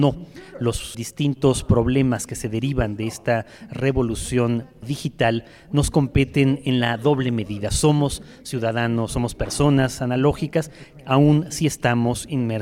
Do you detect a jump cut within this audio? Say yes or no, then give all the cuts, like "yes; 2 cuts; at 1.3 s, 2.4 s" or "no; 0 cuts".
yes; 1 cut; at 0.9 s